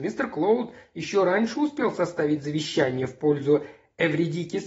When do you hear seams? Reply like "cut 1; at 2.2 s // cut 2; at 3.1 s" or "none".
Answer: none